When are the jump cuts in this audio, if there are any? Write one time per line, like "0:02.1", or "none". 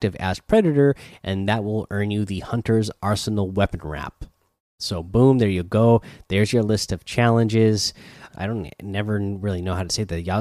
0:08.3

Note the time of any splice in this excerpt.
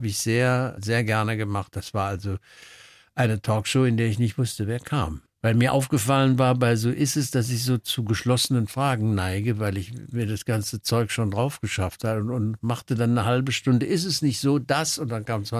none

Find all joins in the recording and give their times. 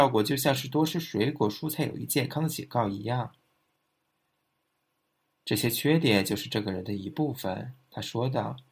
none

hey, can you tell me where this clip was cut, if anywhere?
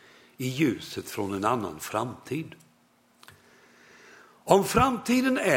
none

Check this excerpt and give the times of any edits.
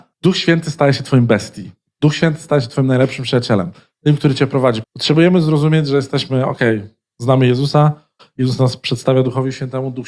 0:04.8

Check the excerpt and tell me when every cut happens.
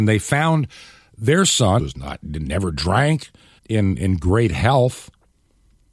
0:01.8
0:03.6

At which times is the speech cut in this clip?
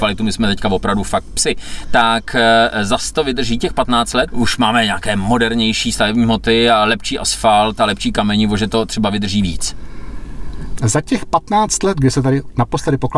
0:04.3
0:10.8

